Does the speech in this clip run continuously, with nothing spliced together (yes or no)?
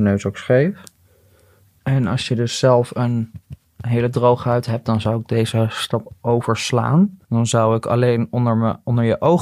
no